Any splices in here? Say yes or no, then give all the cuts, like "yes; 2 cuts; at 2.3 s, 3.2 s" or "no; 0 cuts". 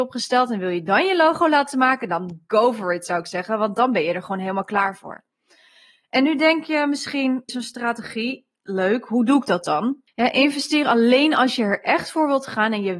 yes; 2 cuts; at 7.5 s, 10.1 s